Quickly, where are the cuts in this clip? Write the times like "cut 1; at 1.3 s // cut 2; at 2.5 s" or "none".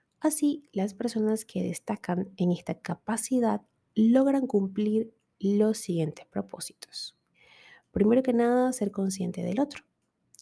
none